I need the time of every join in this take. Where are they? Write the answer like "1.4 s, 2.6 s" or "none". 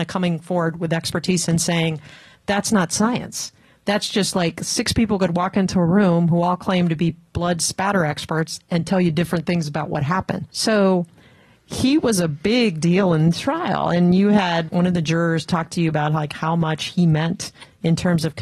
10.5 s, 14.7 s